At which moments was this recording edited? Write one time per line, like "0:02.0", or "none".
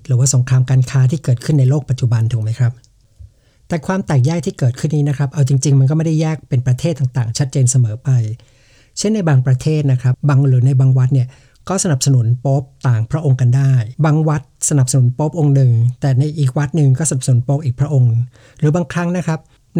0:10.1